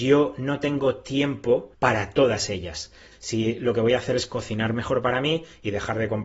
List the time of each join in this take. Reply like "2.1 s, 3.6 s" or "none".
1.7 s, 3.1 s